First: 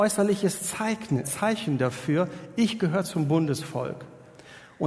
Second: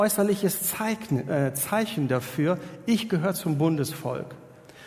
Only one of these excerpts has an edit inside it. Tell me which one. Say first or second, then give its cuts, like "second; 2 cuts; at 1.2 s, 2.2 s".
first; 1 cut; at 1.2 s